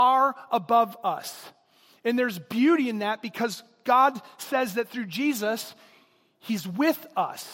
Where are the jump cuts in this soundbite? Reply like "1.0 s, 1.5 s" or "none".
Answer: none